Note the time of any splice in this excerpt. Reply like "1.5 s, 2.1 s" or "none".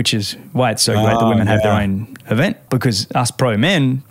2.7 s

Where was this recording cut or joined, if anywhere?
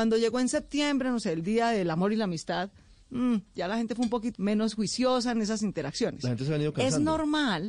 4.4 s

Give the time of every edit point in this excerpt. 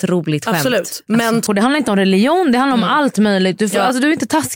1.5 s

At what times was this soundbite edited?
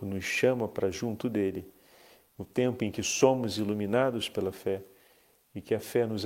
none

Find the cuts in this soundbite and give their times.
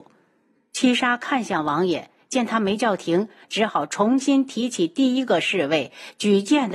none

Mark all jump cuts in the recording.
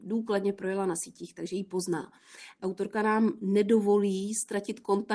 2.6 s

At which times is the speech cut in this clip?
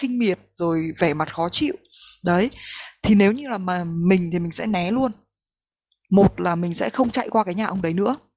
none

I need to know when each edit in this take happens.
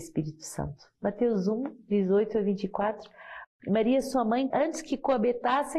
3.4 s, 4.5 s

